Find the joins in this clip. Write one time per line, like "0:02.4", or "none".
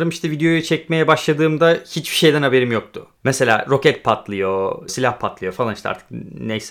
0:03.2
0:04.9